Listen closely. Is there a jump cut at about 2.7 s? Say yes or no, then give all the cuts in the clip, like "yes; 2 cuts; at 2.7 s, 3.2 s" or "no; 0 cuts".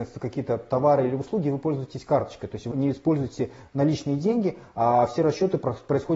yes; 1 cut; at 2.7 s